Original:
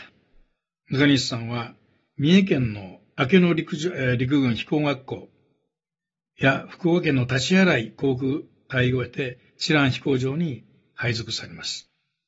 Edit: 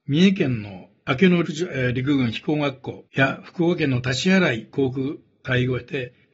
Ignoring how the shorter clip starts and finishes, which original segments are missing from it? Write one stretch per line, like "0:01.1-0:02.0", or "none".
0:03.6-0:03.7
0:05.3-0:06.3

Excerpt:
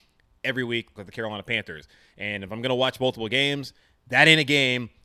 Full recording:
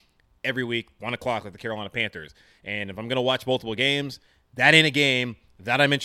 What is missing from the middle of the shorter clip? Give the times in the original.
0:01.0-0:01.4

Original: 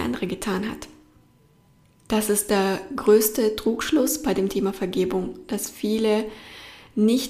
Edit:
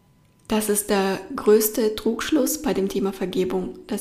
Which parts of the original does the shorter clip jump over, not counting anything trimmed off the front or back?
none

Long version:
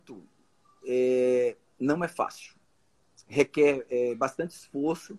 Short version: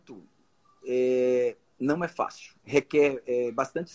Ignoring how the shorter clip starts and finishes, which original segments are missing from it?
0:02.6-0:03.2

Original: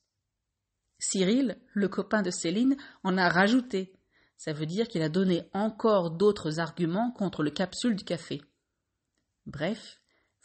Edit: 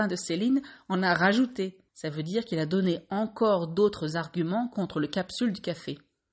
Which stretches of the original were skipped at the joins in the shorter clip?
0:04.0-0:04.3

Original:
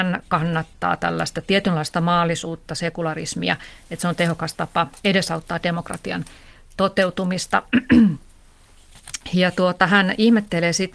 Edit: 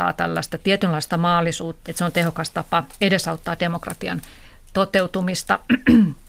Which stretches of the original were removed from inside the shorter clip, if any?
0:02.7-0:03.9

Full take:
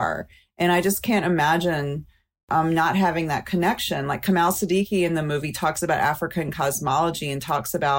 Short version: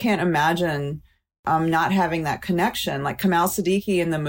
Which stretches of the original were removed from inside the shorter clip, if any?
none

